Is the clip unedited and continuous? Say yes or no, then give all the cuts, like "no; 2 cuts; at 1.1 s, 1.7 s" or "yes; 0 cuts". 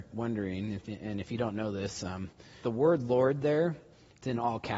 no; 1 cut; at 2.6 s